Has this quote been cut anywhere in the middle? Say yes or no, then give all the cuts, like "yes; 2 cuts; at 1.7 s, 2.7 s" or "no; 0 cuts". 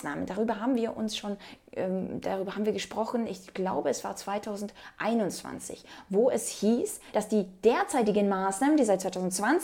no; 0 cuts